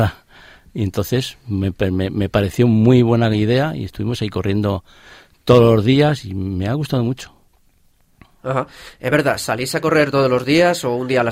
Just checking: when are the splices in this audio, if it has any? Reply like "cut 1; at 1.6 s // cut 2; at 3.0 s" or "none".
none